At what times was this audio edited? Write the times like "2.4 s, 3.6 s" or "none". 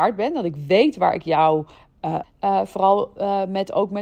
2.2 s